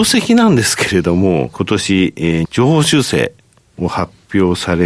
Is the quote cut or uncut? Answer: cut